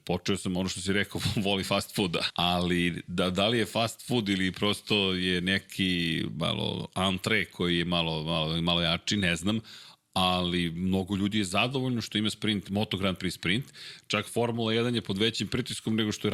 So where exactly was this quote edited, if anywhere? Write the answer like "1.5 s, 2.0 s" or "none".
2.3 s